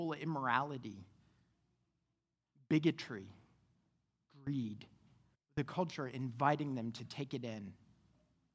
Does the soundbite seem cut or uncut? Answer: cut